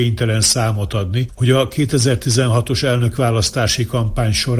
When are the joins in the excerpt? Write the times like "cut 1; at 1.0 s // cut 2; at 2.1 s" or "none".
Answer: none